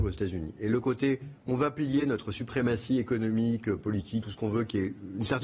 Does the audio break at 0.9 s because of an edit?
no; 1 cut; at 4.2 s

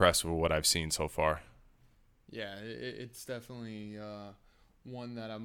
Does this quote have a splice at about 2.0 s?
no; 0 cuts

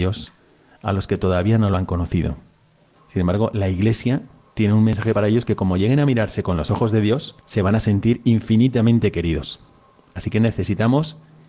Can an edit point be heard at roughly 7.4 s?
yes; 2 cuts; at 2.9 s, 7.4 s

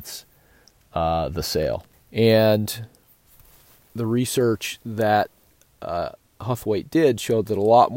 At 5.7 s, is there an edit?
no; 1 cut; at 1.9 s

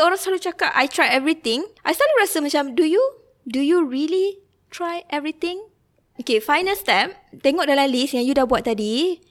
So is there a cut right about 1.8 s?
yes; 1 cut; at 1.8 s

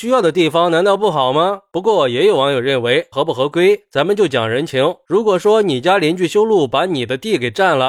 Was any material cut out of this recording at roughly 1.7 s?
no; 1 cut; at 3.1 s

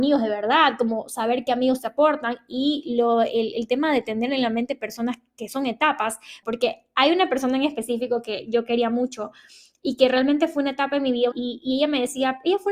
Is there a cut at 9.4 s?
no; 2 cuts; at 6.4 s, 11.3 s

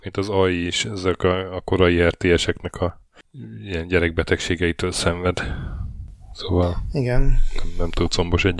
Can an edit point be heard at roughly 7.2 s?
no; 0 cuts

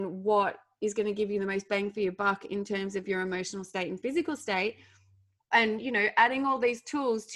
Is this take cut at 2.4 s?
no; 1 cut; at 5.4 s

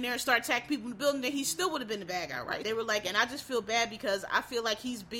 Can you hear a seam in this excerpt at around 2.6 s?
yes; 1 cut; at 2.6 s

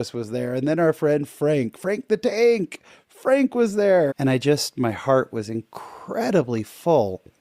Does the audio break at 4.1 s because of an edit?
yes; 1 cut; at 4.1 s

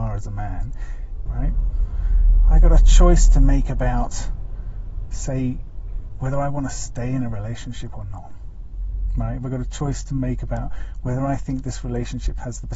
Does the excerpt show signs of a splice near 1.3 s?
yes; 1 cut; at 1.3 s

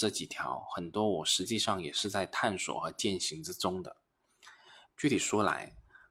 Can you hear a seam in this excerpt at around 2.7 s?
no; 1 cut; at 4.9 s

